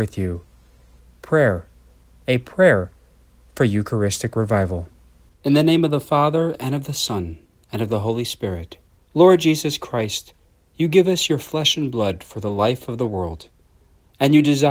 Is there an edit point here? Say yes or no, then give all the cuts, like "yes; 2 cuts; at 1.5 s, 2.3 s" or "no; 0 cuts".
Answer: yes; 1 cut; at 9.0 s